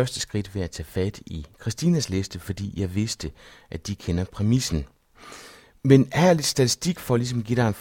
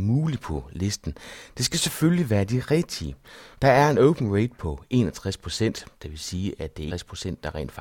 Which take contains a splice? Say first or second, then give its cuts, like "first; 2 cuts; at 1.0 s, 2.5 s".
second; 2 cuts; at 3.5 s, 6.9 s